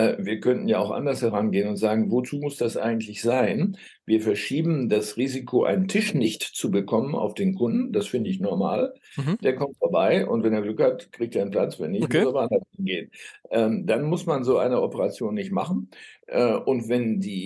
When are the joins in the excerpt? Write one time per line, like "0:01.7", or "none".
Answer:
none

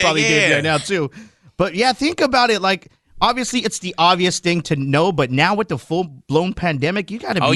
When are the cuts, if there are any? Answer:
none

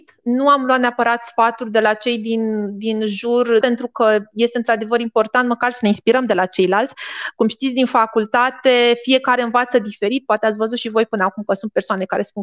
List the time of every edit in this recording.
0:03.6

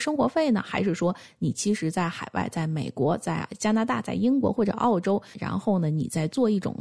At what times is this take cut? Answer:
0:05.3

